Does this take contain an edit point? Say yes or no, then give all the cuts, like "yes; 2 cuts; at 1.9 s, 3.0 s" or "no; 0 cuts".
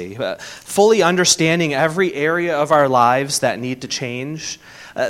no; 0 cuts